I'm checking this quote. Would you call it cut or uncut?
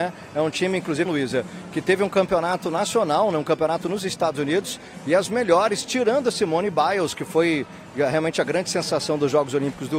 cut